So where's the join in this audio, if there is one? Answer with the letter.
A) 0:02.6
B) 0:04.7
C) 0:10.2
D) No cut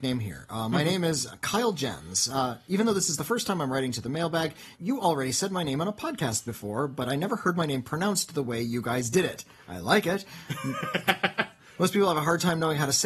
B